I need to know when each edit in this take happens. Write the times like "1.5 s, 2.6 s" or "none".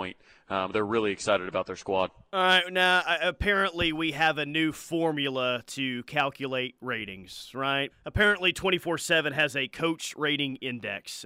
7.9 s